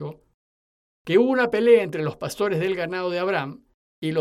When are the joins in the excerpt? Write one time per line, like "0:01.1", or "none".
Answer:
none